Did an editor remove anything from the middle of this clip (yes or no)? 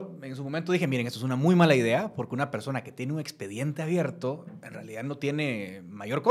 no